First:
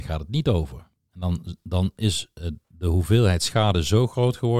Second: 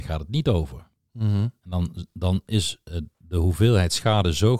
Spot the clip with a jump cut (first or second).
first